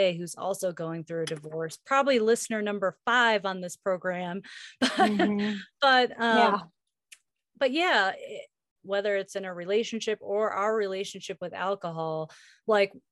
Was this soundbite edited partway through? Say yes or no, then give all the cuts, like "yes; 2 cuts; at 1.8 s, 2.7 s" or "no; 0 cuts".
yes; 1 cut; at 8.8 s